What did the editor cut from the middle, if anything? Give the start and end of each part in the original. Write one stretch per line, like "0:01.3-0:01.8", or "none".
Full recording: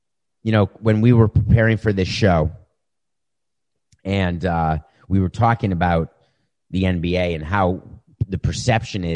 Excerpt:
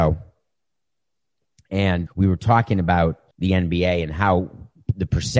0:04.4-0:05.0
0:06.2-0:06.6